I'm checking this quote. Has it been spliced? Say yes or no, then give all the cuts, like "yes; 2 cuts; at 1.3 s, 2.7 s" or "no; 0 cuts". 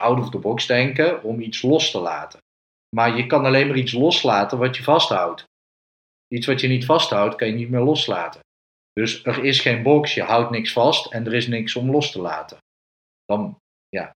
no; 0 cuts